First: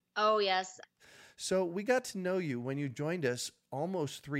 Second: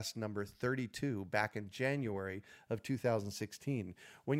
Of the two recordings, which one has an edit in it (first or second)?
first